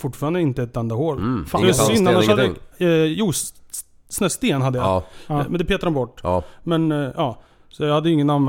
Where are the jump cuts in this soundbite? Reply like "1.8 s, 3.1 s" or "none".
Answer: 2.7 s

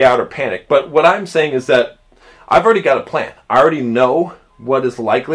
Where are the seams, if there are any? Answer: none

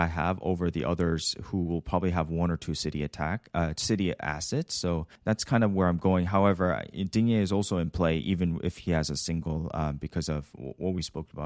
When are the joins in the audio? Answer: 5.2 s

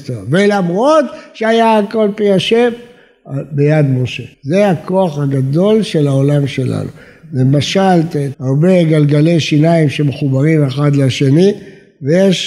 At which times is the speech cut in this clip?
4.3 s, 8.3 s

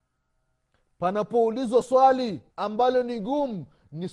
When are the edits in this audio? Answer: 2.5 s

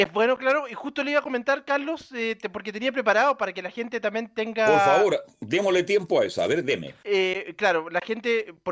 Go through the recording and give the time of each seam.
7.0 s

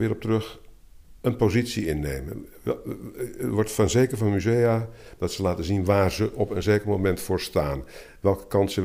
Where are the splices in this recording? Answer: 1.2 s, 5.2 s

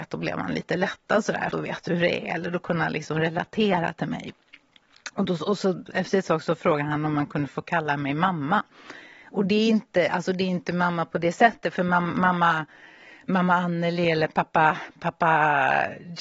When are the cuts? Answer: 1.5 s

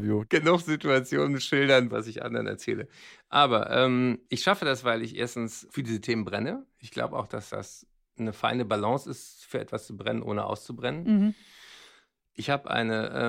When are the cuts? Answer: 1.9 s

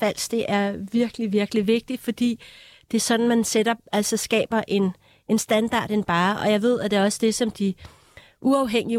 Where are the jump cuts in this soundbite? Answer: none

